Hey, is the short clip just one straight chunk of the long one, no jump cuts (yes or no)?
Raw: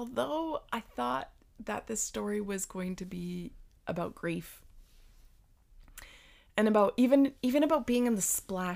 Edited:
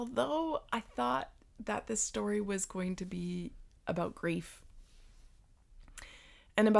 yes